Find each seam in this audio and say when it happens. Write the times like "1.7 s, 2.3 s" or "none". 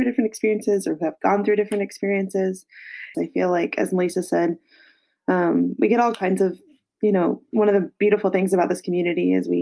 3.1 s